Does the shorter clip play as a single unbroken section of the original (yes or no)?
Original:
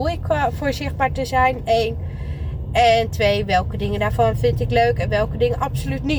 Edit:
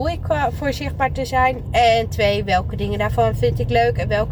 no